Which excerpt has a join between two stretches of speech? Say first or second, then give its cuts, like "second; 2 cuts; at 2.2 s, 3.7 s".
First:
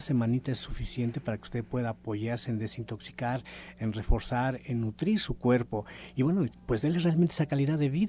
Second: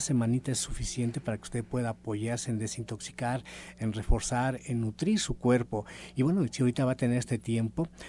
first; 1 cut; at 6.5 s